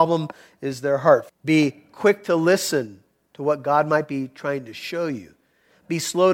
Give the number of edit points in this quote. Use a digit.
1